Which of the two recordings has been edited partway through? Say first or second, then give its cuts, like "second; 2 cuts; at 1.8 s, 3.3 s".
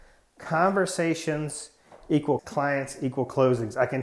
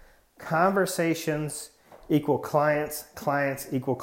first; 1 cut; at 2.4 s